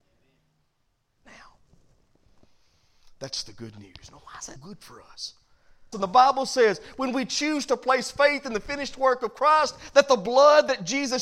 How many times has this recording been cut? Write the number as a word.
two